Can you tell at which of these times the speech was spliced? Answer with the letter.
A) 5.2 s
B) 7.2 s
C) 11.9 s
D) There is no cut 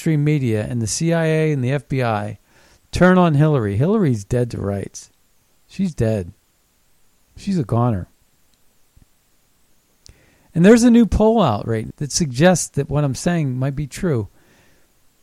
C